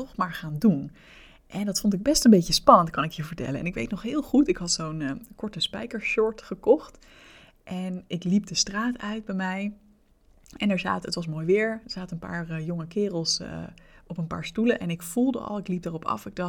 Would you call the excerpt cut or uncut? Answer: uncut